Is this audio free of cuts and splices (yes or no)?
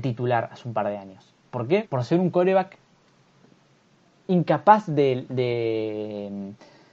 no